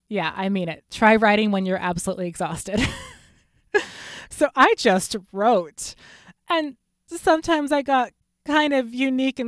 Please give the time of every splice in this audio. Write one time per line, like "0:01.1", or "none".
0:04.3